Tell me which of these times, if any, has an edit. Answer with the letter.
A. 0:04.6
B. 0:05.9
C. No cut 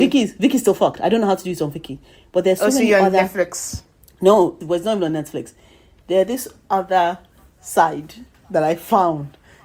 A